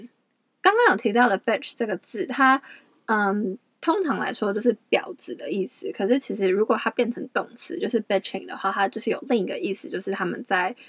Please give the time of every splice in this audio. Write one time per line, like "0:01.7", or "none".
none